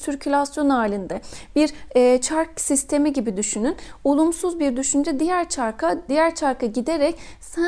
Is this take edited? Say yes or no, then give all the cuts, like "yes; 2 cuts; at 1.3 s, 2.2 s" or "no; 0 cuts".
yes; 1 cut; at 6.1 s